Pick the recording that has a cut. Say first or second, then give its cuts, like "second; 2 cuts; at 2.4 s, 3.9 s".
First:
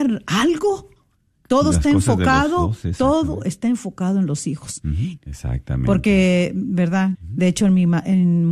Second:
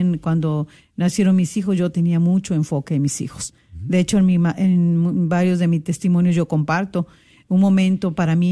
first; 2 cuts; at 5.2 s, 7.1 s